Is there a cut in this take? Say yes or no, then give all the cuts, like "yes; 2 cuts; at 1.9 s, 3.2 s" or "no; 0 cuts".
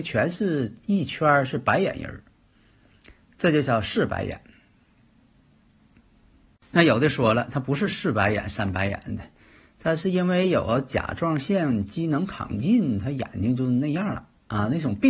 no; 0 cuts